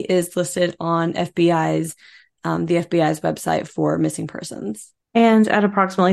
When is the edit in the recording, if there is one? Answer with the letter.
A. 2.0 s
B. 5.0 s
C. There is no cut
B